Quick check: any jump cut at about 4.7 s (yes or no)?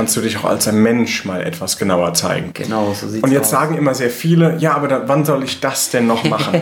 no